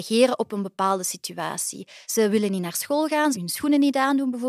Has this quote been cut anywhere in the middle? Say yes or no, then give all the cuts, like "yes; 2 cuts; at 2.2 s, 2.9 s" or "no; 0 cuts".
yes; 2 cuts; at 2.0 s, 3.3 s